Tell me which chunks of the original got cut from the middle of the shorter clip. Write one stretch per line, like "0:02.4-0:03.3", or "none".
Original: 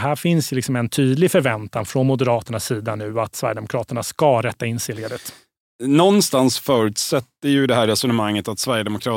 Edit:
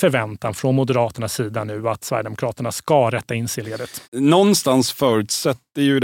0:05.4-0:05.7